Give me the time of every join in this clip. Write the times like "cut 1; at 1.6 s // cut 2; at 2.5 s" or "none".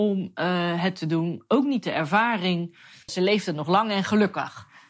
cut 1; at 3.1 s